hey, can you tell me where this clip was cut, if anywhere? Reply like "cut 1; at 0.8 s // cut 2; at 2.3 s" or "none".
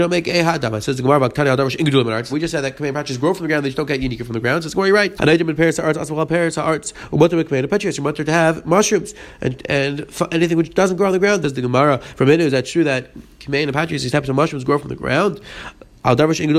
cut 1; at 2.3 s // cut 2; at 5.2 s // cut 3; at 11.4 s